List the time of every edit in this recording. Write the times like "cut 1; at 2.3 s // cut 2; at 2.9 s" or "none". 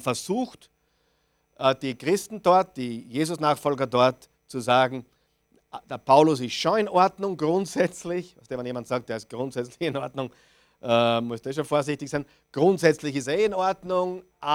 none